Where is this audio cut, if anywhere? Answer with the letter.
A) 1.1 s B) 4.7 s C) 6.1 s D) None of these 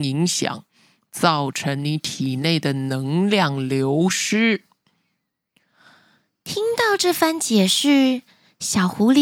D